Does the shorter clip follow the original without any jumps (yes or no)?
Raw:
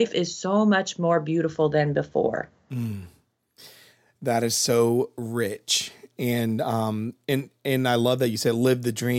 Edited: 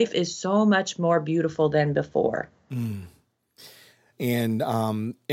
no